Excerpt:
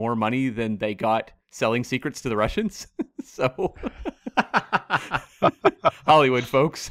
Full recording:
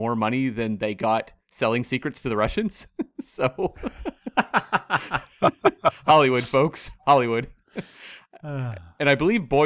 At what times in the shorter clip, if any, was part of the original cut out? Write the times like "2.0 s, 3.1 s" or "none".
none